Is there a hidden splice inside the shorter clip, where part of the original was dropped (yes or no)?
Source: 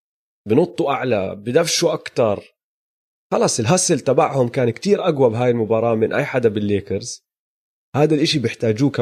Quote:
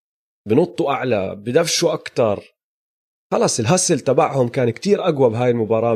no